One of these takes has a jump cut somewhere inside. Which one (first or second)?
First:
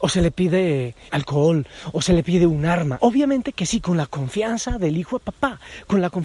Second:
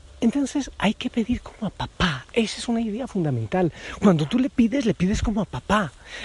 first